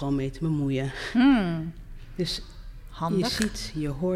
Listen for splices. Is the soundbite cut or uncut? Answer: uncut